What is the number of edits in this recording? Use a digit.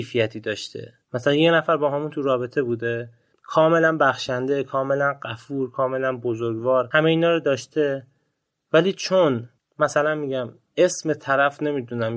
1